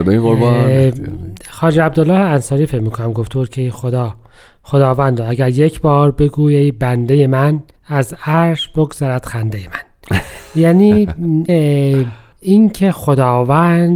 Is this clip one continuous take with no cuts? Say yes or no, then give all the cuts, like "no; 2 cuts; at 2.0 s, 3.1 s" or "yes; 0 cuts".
no; 1 cut; at 11.5 s